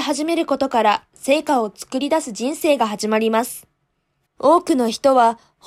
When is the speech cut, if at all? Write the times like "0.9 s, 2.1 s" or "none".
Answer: 4.2 s